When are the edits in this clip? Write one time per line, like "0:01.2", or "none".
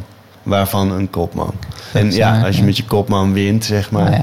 0:01.9